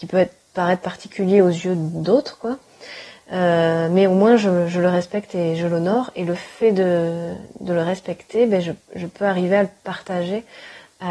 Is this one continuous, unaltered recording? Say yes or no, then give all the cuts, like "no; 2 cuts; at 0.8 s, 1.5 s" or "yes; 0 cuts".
yes; 0 cuts